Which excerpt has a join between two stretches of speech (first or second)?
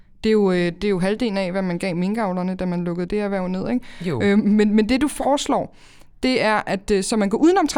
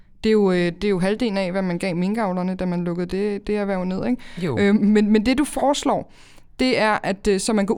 first